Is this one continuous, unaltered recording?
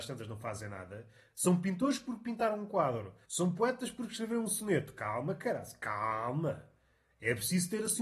no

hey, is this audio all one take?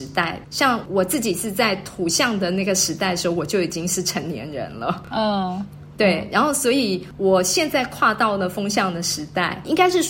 yes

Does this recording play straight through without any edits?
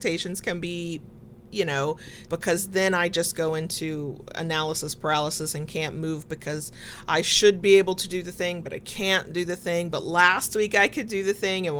no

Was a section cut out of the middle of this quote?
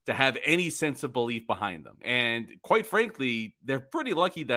no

